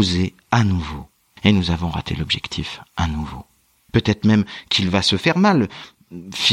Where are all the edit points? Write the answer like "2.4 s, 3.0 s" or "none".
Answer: 3.9 s